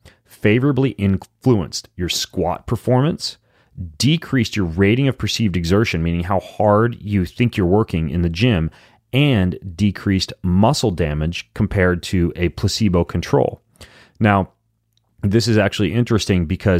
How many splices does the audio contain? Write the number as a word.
zero